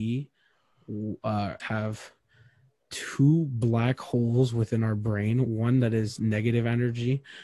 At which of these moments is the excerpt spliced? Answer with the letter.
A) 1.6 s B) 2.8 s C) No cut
A